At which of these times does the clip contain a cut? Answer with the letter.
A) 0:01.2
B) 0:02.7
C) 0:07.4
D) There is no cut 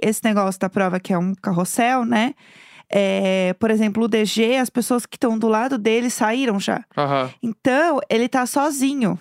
D